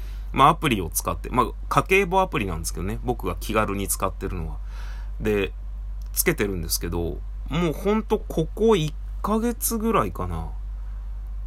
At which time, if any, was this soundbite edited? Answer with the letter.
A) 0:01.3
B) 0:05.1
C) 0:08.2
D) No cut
D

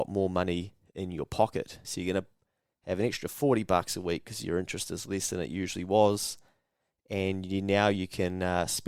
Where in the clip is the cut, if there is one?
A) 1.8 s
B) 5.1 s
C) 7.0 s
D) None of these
A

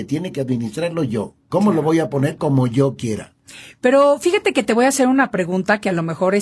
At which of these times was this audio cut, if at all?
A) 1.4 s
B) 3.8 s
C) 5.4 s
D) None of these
D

